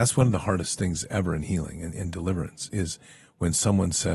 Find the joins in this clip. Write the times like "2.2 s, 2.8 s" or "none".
none